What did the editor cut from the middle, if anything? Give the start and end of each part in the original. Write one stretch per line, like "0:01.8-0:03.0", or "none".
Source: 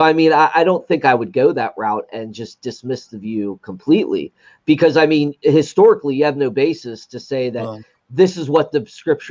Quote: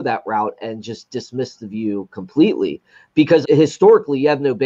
0:04.9-0:05.4